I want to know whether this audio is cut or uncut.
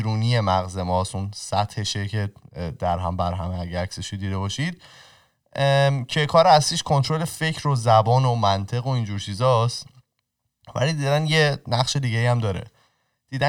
uncut